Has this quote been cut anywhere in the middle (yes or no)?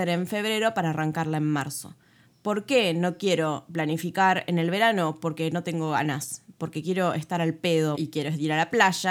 yes